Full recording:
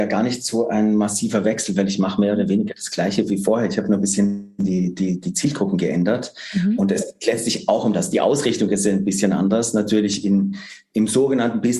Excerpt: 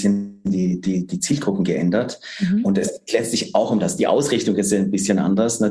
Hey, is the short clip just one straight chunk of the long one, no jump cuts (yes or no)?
yes